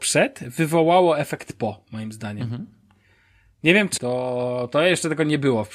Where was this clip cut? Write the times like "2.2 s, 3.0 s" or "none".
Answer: 4.0 s